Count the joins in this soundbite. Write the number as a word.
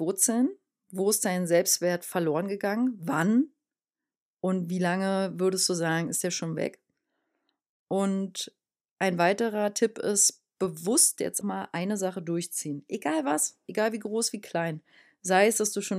one